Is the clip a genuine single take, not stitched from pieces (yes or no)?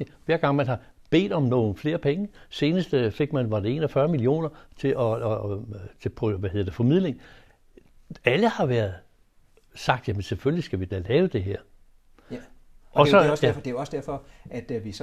yes